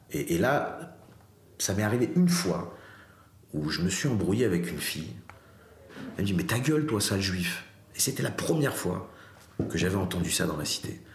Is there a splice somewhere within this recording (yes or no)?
no